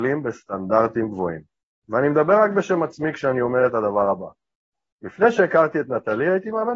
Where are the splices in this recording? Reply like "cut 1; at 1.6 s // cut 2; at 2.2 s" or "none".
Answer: none